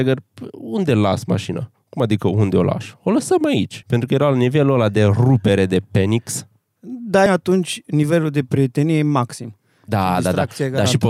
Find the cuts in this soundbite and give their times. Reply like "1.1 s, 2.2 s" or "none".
3.8 s, 7.3 s